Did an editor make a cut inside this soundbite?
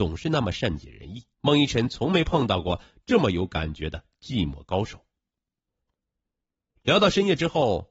yes; 1 cut; at 1.3 s

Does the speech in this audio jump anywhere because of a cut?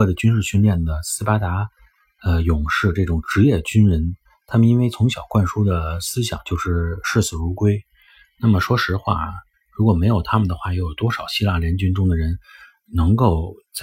no; 0 cuts

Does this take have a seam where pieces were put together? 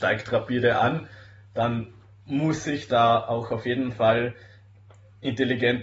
no; 0 cuts

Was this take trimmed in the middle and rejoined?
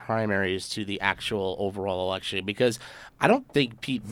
no; 0 cuts

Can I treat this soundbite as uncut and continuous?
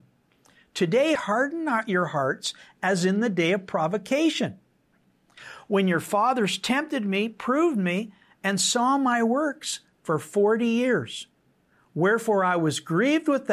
no; 1 cut; at 1.2 s

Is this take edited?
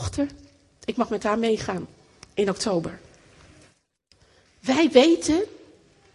no; 0 cuts

